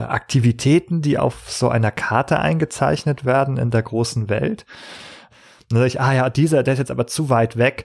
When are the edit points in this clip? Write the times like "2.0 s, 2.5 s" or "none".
5.3 s